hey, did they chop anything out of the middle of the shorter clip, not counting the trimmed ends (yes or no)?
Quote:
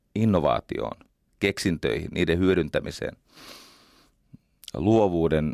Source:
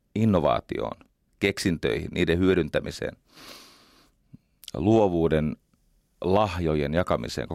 no